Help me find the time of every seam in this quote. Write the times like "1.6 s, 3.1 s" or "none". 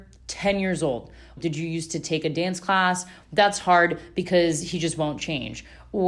1.4 s, 3.2 s

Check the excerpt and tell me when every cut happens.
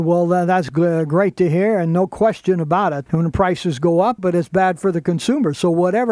3.1 s, 4.2 s

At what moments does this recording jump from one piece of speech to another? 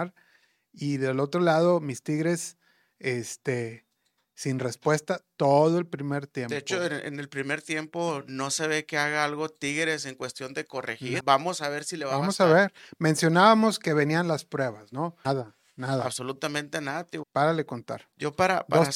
11.2 s, 15.2 s, 17.2 s

